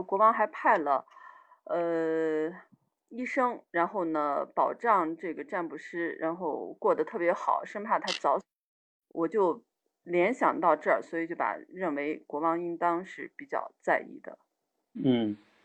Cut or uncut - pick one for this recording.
uncut